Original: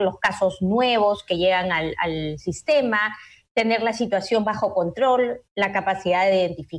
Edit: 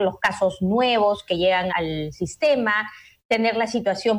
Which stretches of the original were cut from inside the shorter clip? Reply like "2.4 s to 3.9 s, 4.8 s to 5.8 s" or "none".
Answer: 1.7 s to 2.0 s